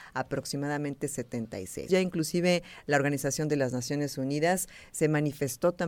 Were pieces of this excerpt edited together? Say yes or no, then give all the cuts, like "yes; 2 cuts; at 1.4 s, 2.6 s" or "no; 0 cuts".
yes; 1 cut; at 1.9 s